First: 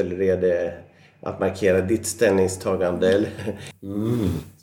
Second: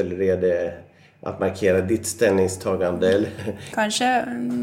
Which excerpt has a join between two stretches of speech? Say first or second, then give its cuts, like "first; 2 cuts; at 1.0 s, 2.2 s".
first; 1 cut; at 3.7 s